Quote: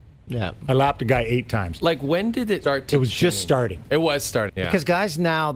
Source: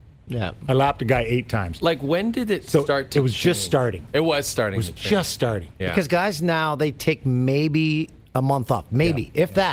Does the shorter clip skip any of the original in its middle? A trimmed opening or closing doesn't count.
yes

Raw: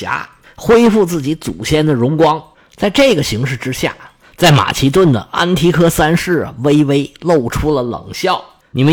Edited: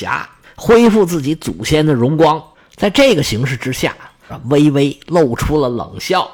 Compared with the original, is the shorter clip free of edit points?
no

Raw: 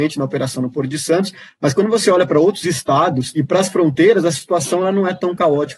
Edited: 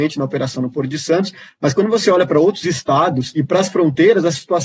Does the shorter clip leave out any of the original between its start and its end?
no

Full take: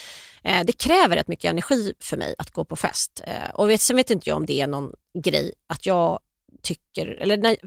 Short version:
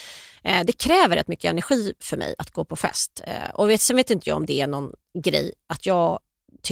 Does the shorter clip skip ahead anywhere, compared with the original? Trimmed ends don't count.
no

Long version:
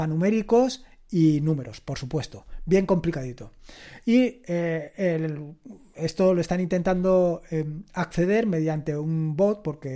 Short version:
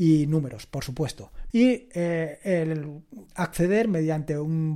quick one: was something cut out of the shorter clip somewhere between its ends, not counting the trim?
yes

